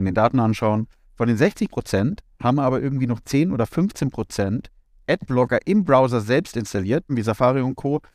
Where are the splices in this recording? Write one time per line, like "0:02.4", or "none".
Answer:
0:01.0
0:07.1